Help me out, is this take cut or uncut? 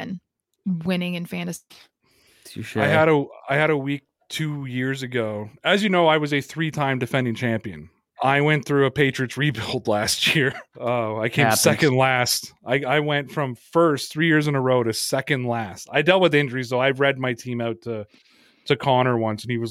cut